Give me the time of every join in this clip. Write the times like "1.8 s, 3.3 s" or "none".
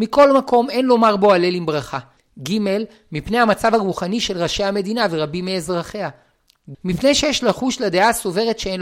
2.2 s, 6.7 s